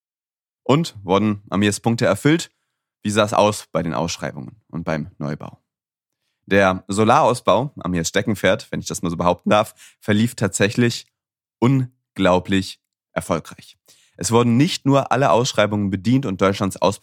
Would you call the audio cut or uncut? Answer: uncut